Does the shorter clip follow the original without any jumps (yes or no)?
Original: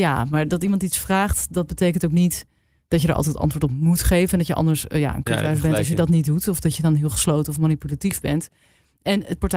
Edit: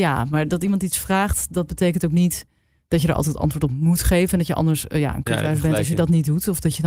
yes